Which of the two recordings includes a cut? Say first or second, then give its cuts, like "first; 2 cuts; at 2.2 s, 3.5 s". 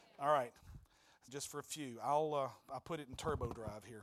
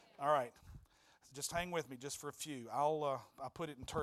first; 1 cut; at 1.3 s